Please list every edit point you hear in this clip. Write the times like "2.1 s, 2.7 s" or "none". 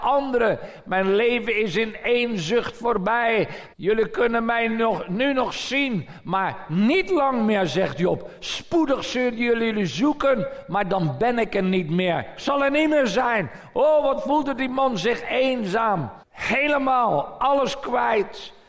3.7 s, 16.2 s